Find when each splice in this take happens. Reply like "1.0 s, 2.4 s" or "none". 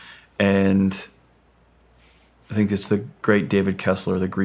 none